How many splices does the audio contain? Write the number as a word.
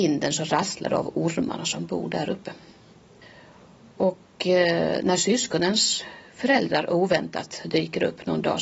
zero